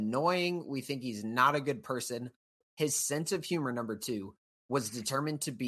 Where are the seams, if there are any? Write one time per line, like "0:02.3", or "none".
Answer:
0:02.6